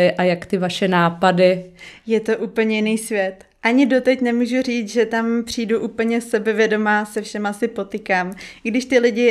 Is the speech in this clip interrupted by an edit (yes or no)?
no